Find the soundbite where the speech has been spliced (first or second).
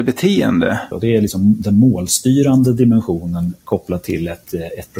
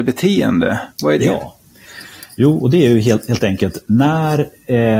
first